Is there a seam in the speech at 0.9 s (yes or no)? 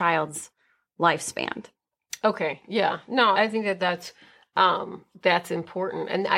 no